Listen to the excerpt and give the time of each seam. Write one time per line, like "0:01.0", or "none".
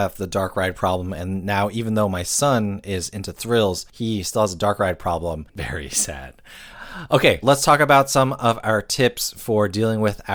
0:05.5
0:07.4